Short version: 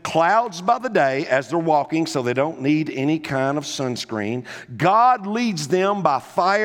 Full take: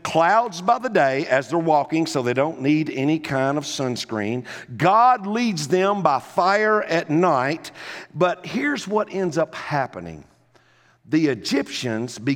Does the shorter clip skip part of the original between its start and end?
no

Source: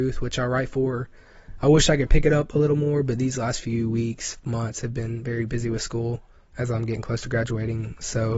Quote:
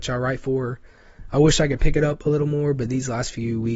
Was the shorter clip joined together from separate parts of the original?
no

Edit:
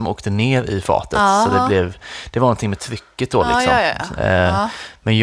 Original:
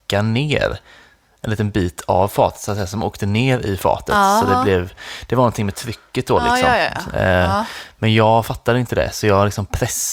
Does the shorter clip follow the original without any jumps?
yes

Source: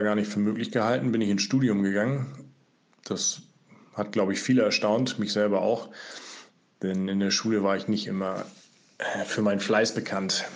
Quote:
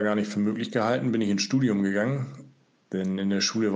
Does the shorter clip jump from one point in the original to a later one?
yes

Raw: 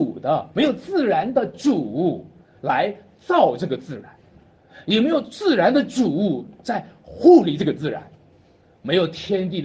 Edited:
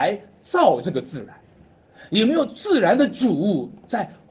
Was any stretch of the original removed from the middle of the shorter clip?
no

